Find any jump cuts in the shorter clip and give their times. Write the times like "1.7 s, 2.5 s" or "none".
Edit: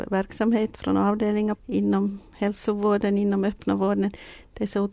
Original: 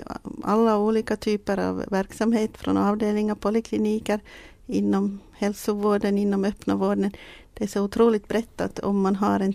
1.5 s

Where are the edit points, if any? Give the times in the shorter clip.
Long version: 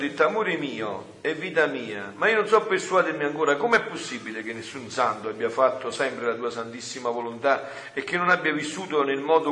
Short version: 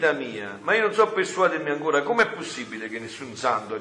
none

